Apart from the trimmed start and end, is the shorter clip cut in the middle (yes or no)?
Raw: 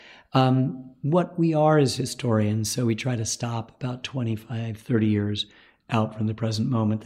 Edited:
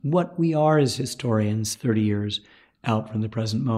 yes